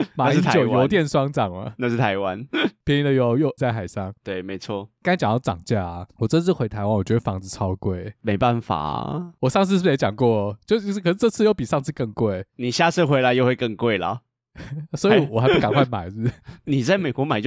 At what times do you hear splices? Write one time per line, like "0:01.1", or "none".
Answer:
0:03.6